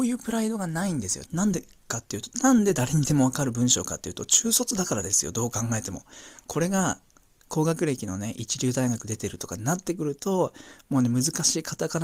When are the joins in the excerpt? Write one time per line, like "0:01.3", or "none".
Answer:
0:01.3